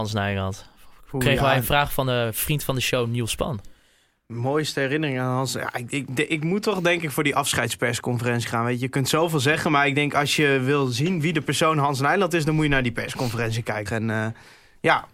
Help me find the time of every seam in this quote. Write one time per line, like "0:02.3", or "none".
0:13.9